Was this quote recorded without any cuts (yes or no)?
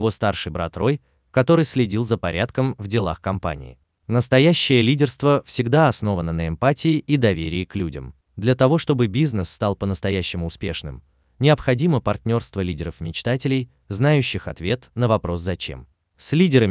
no